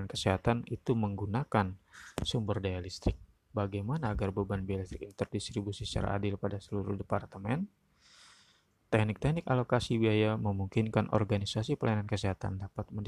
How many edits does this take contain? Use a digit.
1